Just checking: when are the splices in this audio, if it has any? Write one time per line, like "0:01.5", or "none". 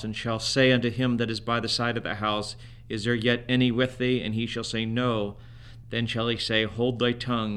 none